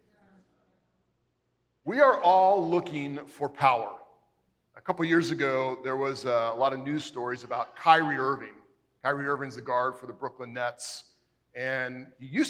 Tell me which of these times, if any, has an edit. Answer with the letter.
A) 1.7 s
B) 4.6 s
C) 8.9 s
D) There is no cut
B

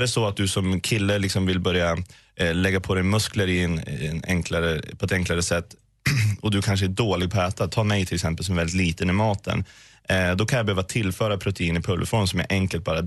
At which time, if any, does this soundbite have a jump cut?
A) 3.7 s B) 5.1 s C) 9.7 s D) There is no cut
D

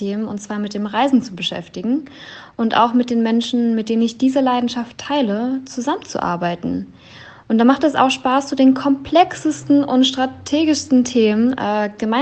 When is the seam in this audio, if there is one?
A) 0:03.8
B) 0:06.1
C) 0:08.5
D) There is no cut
D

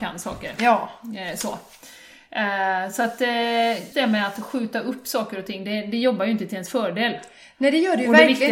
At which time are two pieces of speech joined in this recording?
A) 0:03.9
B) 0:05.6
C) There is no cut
A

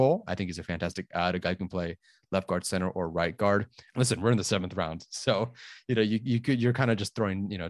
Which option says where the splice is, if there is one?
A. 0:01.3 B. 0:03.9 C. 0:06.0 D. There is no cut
B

